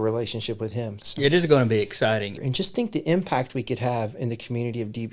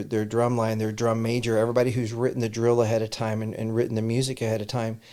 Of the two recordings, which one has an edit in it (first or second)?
first